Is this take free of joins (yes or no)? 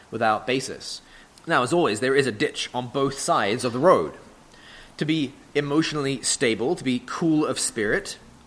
no